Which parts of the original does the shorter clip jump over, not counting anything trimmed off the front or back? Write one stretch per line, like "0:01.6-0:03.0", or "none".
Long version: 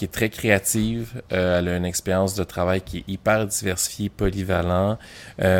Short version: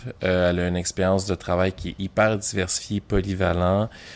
none